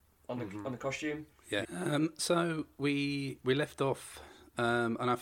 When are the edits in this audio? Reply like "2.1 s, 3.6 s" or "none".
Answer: 1.7 s